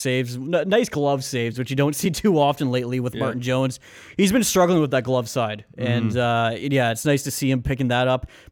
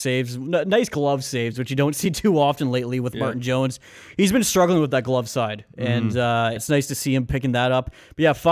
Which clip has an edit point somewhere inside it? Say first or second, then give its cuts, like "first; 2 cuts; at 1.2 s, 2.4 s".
second; 1 cut; at 6.6 s